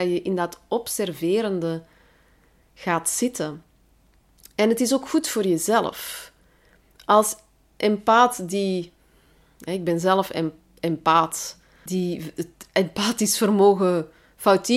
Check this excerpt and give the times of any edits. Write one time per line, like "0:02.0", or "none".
0:11.9